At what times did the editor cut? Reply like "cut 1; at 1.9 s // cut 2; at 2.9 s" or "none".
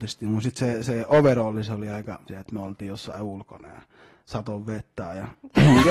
cut 1; at 2.3 s